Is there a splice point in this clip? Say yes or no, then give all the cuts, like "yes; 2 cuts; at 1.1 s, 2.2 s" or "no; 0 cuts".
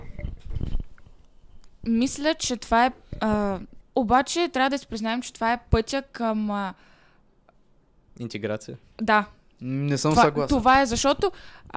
yes; 1 cut; at 3.8 s